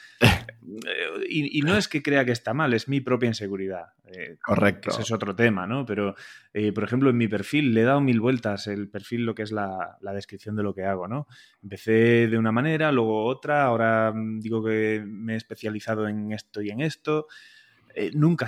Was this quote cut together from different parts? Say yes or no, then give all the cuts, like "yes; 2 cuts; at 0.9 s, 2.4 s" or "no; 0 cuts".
no; 0 cuts